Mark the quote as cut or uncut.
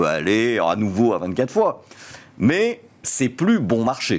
cut